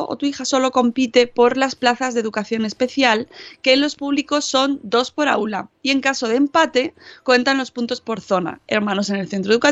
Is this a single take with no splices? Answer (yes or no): yes